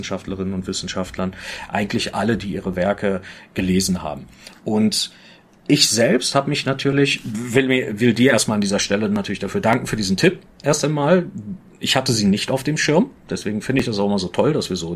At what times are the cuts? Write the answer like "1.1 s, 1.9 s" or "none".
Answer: none